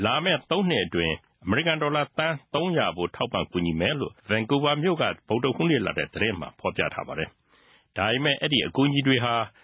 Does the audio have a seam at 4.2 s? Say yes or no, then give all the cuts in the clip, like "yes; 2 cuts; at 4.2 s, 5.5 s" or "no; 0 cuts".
yes; 1 cut; at 4.2 s